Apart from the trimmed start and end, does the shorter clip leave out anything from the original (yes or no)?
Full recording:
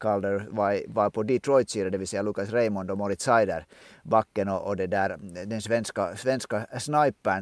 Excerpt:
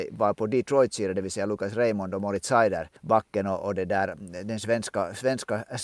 yes